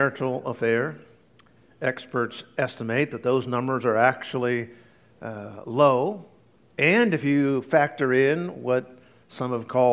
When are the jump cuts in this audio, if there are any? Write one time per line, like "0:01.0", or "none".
0:06.6